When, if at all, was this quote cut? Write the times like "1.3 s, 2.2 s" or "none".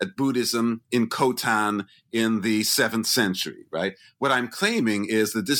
none